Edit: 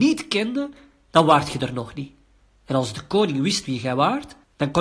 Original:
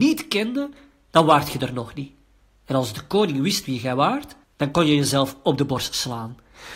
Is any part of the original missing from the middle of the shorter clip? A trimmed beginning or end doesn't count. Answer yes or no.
no